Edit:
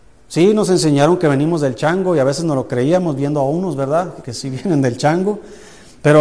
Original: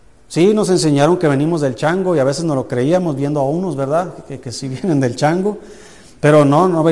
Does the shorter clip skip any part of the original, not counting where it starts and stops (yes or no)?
yes